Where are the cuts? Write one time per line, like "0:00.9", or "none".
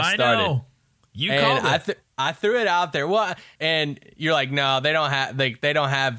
0:03.6